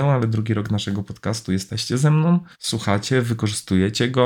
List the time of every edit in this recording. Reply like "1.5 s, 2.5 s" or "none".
2.5 s